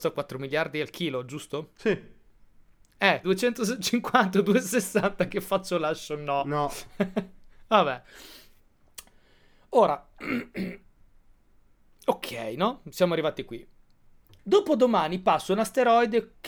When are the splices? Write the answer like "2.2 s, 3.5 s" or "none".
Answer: 3.2 s